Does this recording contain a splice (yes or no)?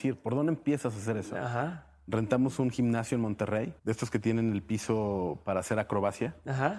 yes